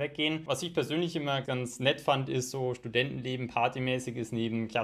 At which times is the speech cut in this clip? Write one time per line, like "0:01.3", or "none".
0:01.4